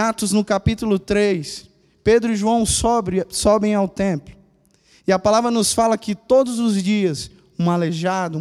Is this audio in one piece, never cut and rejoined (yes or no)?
yes